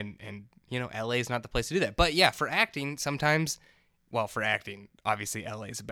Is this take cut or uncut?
uncut